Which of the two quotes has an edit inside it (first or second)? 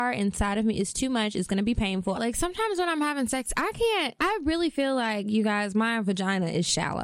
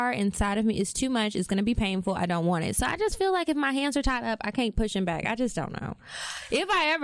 first